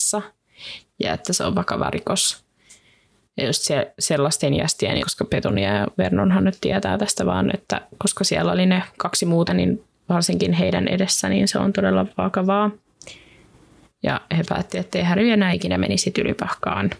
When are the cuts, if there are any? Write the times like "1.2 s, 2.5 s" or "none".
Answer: 5.0 s, 9.5 s, 13.8 s